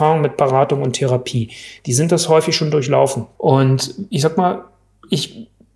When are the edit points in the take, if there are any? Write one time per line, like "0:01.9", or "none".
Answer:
0:03.4

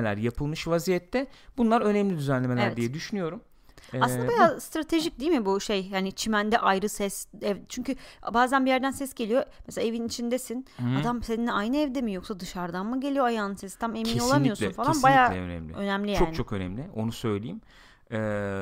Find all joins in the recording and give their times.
none

